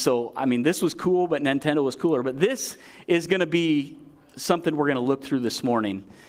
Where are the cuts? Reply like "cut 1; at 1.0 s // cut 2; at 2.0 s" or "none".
none